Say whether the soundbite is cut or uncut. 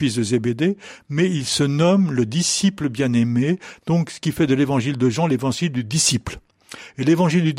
uncut